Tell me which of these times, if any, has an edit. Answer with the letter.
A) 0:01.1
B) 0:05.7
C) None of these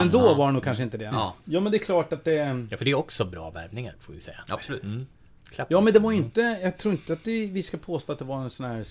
A